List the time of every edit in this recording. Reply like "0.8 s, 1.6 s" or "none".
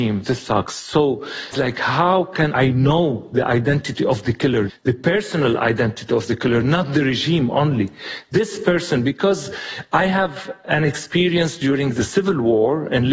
1.5 s, 4.7 s

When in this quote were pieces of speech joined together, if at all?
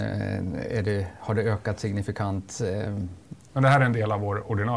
3.5 s

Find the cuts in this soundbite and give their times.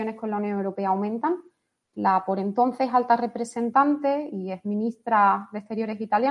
1.9 s

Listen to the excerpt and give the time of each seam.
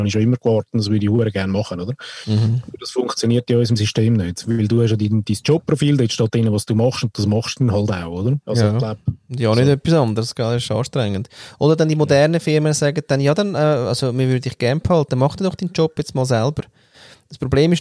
8.4 s

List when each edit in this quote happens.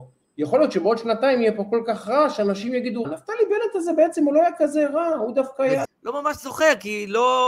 3.0 s, 5.8 s

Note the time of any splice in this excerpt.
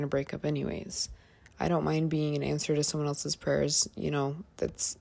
1.5 s

